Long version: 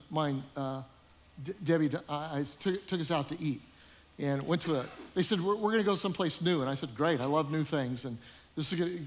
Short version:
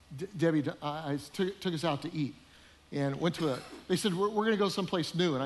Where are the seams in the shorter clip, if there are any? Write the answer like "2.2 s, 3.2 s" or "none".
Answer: none